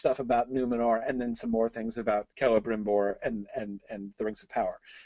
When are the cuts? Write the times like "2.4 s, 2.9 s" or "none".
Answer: 2.3 s, 3.5 s